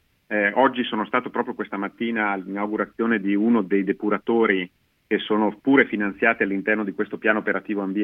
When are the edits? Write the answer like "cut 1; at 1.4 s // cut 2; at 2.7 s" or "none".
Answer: none